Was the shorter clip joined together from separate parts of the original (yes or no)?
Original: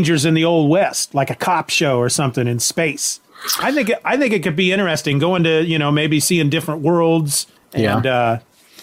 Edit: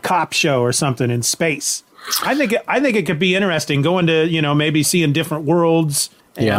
no